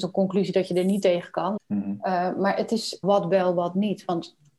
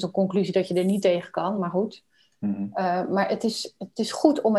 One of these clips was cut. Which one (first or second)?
first